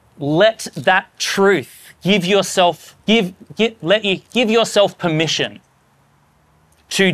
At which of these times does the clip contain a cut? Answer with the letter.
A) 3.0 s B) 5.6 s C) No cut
A